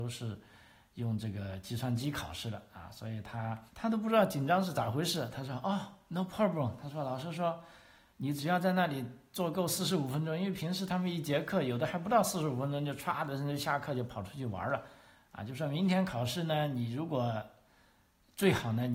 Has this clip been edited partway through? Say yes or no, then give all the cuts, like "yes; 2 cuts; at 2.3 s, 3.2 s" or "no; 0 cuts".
yes; 1 cut; at 3.7 s